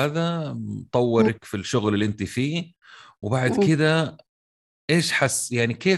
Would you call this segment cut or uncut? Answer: uncut